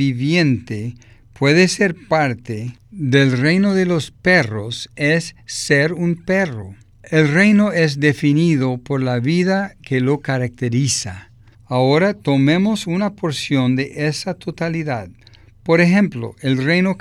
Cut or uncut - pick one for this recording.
cut